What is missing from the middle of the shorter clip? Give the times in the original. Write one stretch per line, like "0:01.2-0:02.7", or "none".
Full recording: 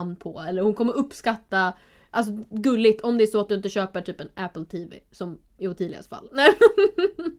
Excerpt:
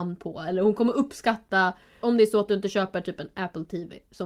0:02.0-0:03.0